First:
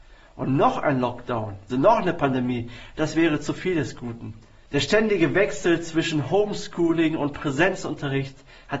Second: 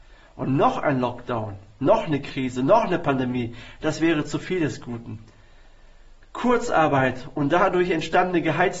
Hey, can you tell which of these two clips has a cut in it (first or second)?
first